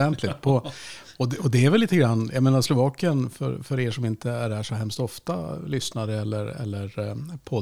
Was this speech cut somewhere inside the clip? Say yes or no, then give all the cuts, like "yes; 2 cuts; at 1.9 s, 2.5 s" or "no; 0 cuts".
no; 0 cuts